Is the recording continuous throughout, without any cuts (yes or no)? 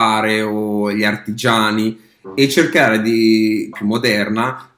no